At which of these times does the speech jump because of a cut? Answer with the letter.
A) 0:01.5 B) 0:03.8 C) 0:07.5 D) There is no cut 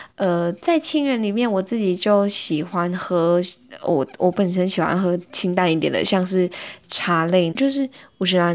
C